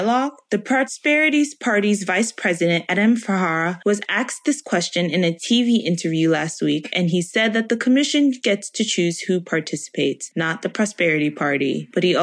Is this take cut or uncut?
uncut